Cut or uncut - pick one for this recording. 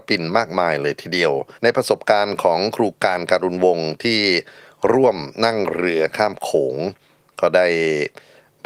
cut